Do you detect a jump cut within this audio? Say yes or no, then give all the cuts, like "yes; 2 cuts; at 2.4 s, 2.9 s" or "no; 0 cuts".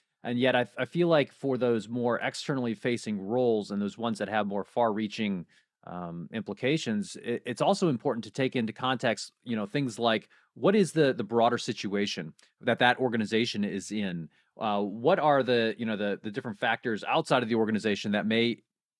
no; 0 cuts